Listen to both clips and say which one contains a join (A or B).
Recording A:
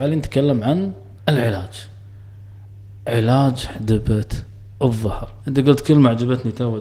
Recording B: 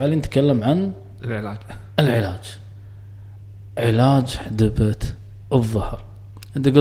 A